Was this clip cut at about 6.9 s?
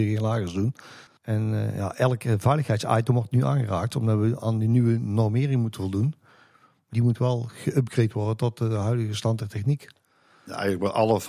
yes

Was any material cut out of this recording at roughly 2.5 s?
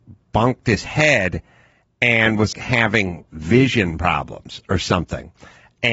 yes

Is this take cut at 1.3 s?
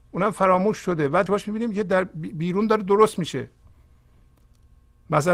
yes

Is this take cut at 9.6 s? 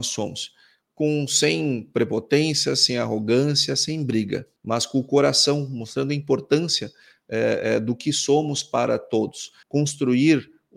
yes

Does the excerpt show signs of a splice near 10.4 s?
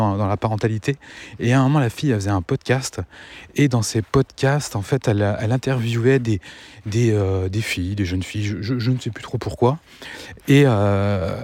no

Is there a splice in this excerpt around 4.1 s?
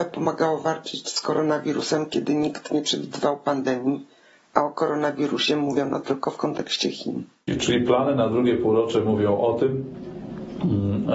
no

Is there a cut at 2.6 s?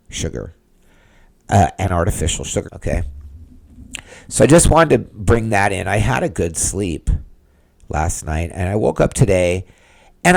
yes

